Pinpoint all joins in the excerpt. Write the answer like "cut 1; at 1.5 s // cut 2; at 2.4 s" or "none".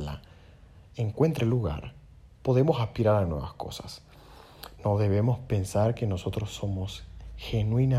cut 1; at 4.8 s